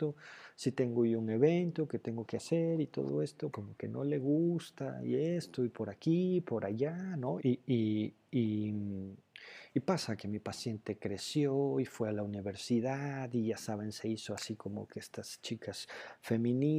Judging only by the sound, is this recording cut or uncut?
cut